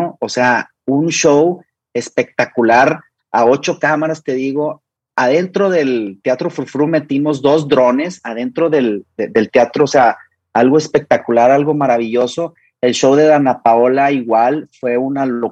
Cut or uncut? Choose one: uncut